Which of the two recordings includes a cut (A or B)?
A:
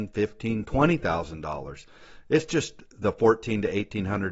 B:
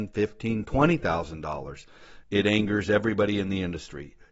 B